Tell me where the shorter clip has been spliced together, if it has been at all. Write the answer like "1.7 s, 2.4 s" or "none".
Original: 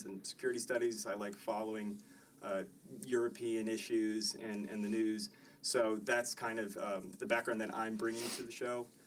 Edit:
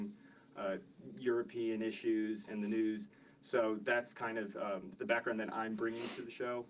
2.5 s